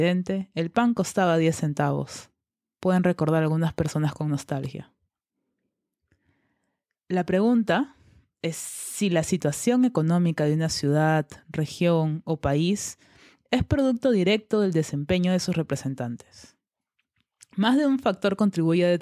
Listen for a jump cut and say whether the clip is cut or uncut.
uncut